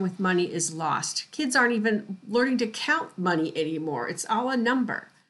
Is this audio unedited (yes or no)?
yes